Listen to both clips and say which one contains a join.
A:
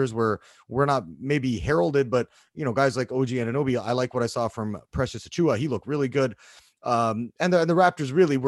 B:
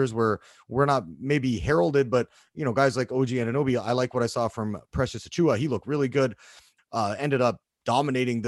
B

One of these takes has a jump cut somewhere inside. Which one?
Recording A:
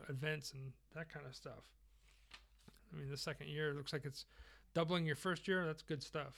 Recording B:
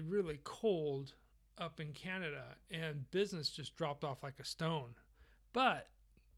A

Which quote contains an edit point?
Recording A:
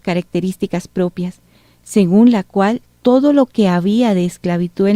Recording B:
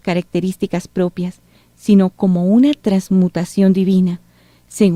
A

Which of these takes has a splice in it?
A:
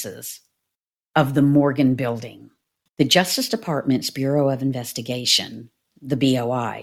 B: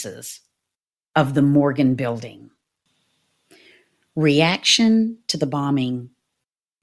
A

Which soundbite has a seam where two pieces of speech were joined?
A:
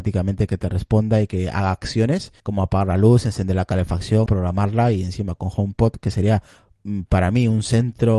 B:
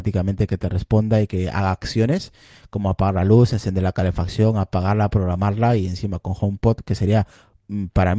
A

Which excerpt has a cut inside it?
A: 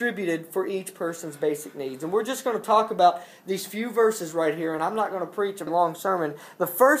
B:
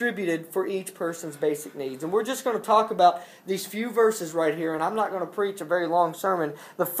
A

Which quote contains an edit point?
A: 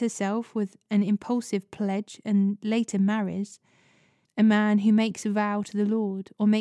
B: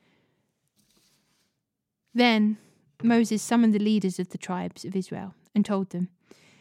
A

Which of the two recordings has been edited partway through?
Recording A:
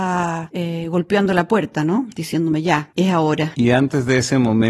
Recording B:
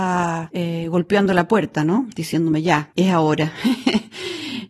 A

